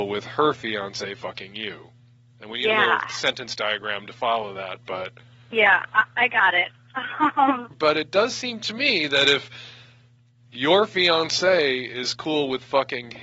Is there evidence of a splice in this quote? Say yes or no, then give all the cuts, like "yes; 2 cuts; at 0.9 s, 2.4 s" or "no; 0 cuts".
yes; 1 cut; at 7.7 s